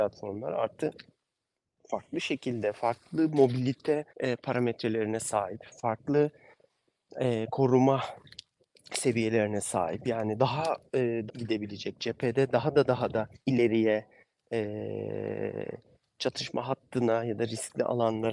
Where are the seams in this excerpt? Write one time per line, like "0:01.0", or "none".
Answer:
0:04.1
0:11.3
0:13.4